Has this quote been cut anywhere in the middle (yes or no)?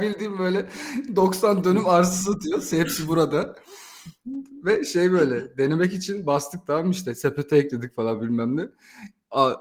no